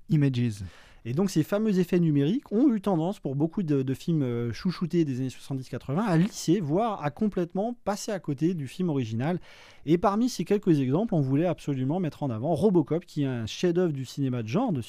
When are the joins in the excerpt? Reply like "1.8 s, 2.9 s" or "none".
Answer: none

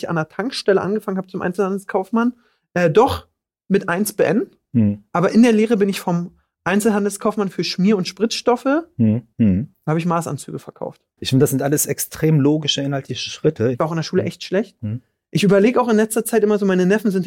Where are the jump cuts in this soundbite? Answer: 9.3 s, 11.2 s, 13.7 s

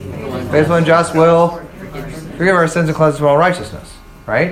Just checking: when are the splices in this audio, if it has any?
none

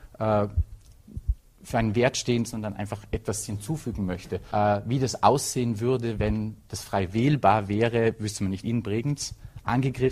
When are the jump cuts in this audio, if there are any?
2.4 s, 4.5 s, 8.6 s

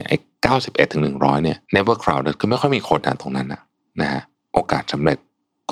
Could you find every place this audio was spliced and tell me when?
1.7 s

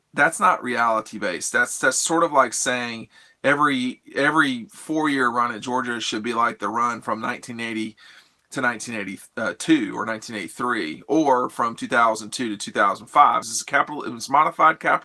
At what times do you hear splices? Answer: 13.4 s

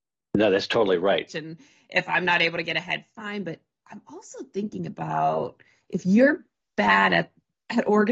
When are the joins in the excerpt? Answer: 1.3 s

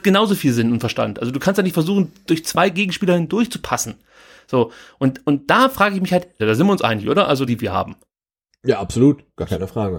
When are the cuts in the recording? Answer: 6.4 s, 7.5 s

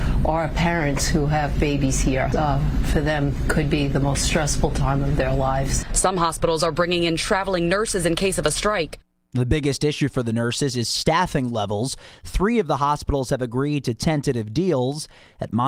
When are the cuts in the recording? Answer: 2.3 s, 5.9 s

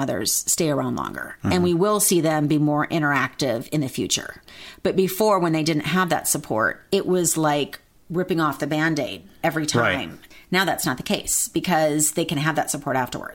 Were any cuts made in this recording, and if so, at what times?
none

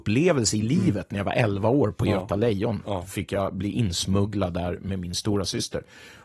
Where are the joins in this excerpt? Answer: none

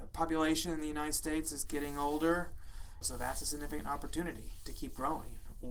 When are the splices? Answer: 3.0 s

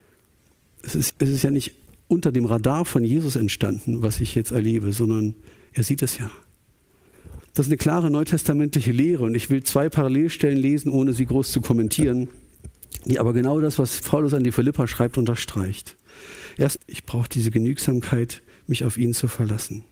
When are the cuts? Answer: 1.1 s, 7.4 s, 16.8 s

